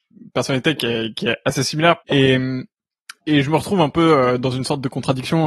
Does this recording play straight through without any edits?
no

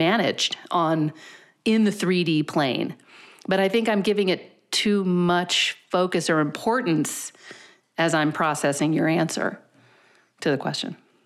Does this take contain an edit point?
no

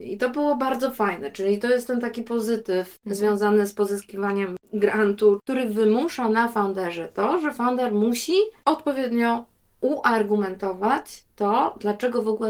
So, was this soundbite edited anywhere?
no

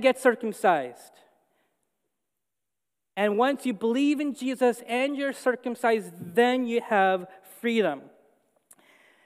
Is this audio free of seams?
no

